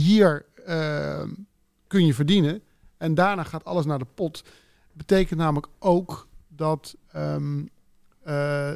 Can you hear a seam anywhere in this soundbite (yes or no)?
no